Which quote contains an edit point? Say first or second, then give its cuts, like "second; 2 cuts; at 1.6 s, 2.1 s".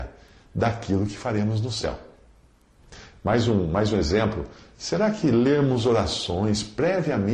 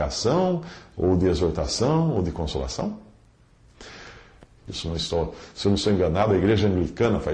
second; 1 cut; at 4.6 s